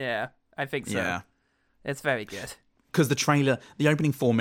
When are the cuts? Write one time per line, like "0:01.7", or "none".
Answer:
none